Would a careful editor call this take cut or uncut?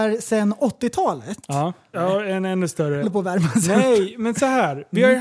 cut